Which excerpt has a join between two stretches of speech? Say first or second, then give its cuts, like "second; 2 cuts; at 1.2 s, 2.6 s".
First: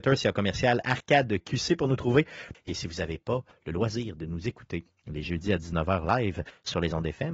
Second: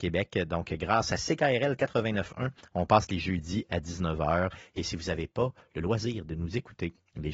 first; 1 cut; at 2.5 s